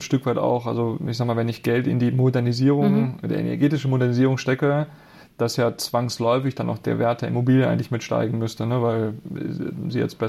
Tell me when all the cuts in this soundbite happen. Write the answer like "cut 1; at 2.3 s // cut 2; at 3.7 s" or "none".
none